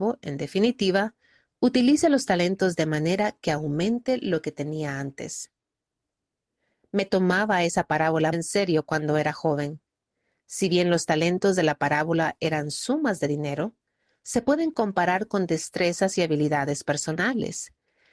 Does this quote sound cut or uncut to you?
cut